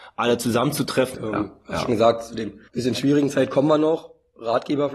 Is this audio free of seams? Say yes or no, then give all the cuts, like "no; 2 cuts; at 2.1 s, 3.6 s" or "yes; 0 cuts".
no; 2 cuts; at 1.1 s, 2.7 s